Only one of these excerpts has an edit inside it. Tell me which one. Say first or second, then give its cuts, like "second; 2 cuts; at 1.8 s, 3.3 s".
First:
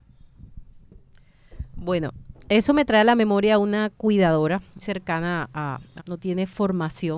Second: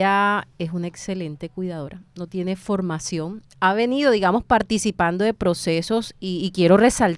first; 2 cuts; at 4.8 s, 6.0 s